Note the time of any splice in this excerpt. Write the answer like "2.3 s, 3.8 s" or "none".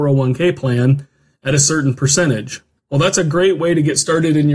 2.8 s